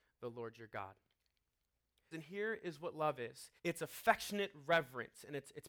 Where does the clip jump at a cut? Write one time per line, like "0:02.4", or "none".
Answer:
0:02.1
0:03.6